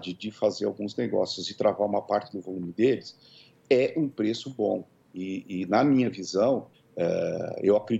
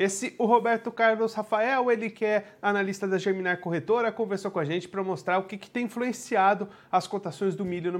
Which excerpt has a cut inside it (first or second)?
first